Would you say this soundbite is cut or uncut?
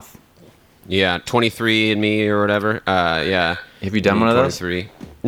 uncut